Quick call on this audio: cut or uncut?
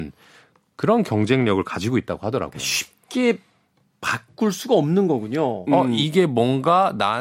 cut